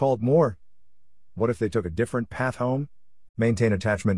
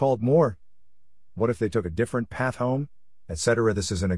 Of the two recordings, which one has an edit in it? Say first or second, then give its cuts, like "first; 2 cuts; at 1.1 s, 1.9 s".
first; 1 cut; at 3.3 s